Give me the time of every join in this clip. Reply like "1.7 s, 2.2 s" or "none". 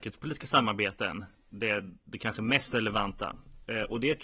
none